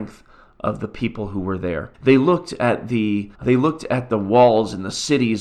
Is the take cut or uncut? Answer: cut